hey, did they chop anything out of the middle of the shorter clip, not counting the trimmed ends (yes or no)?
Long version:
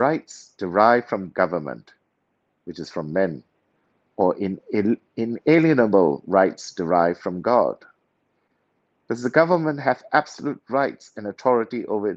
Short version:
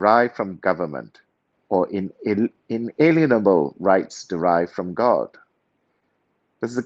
yes